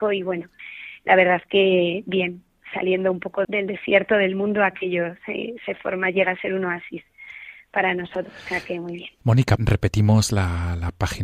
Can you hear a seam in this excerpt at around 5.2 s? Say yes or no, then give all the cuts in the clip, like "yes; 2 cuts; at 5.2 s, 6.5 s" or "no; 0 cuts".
no; 2 cuts; at 3.4 s, 9.6 s